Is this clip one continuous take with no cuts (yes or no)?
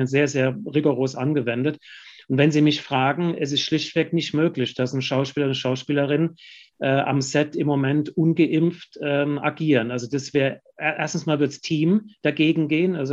yes